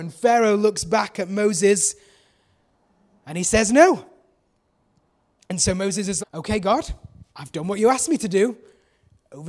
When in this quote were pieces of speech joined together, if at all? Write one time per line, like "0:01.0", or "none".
0:06.2
0:07.3